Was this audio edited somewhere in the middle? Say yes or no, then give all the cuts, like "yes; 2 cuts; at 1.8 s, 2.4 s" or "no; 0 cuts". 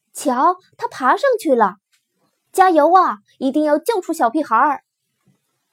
no; 0 cuts